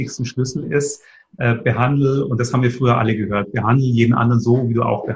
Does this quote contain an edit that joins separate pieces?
no; 0 cuts

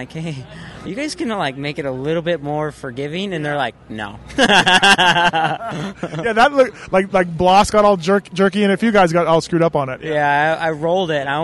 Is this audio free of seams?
yes; 0 cuts

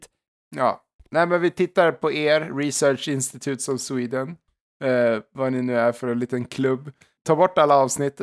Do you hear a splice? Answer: no; 0 cuts

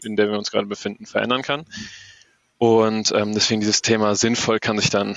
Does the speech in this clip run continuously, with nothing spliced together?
yes; 0 cuts

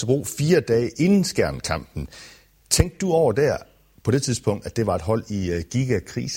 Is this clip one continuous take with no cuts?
yes; 0 cuts

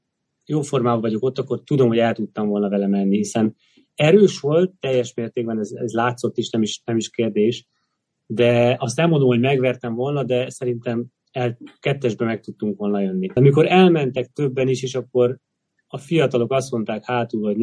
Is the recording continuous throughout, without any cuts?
no; 1 cut; at 13.4 s

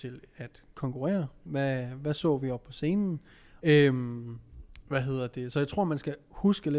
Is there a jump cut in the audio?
yes; 1 cut; at 3.6 s

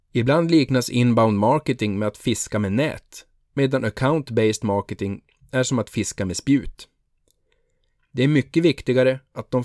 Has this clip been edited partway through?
yes; 1 cut; at 8.0 s

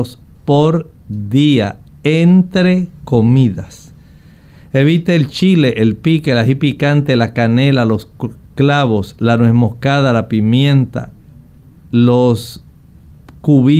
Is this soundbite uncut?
yes; 0 cuts

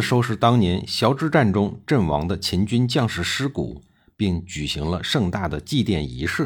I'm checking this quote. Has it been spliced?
no; 0 cuts

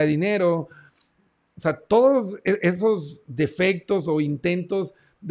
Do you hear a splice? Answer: no; 0 cuts

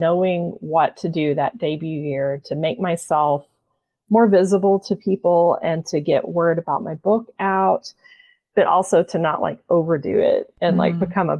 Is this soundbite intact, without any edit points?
yes; 0 cuts

